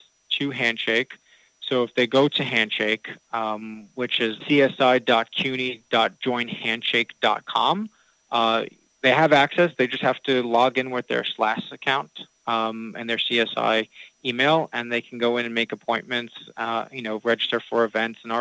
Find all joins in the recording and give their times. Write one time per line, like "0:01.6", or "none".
0:16.8